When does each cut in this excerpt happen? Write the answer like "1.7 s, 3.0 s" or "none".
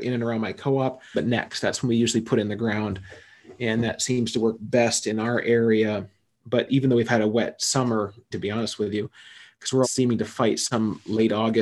1.1 s, 8.3 s, 9.8 s